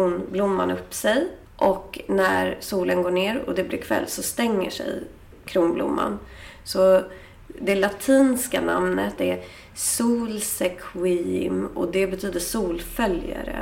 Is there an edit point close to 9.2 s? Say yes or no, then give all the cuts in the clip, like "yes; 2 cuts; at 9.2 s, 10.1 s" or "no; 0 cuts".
yes; 1 cut; at 9.2 s